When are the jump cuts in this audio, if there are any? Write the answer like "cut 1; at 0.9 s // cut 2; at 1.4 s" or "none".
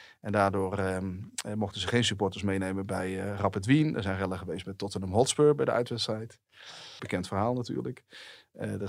cut 1; at 7.0 s